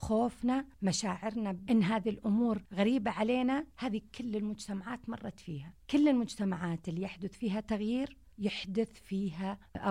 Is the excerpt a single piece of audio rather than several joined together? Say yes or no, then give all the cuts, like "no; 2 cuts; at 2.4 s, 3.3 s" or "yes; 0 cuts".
yes; 0 cuts